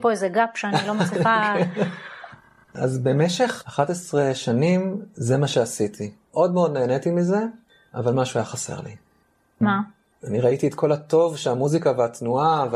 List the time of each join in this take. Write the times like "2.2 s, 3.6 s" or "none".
10.1 s